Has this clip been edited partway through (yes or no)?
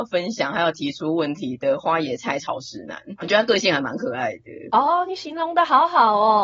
no